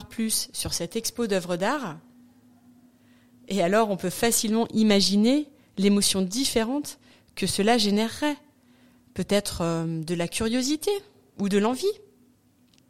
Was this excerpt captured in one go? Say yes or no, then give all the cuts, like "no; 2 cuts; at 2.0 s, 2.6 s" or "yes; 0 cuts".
yes; 0 cuts